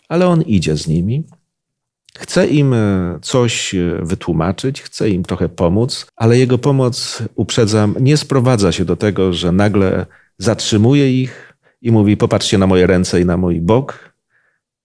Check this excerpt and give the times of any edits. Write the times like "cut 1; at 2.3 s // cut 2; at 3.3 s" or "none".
cut 1; at 6.1 s